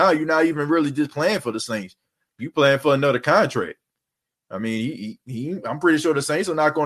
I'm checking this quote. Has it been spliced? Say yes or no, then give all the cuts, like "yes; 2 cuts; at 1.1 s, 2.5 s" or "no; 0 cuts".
no; 0 cuts